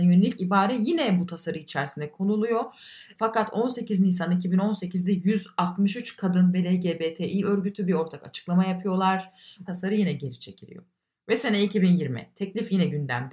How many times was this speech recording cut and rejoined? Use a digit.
1